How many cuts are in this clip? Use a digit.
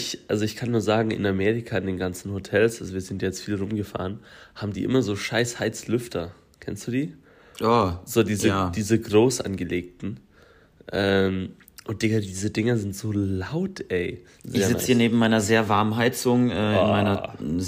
1